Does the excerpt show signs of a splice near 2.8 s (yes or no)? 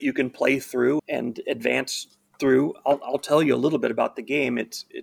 no